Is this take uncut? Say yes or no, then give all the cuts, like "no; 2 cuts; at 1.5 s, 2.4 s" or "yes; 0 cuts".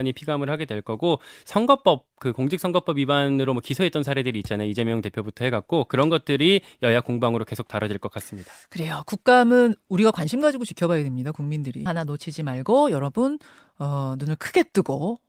no; 1 cut; at 11.9 s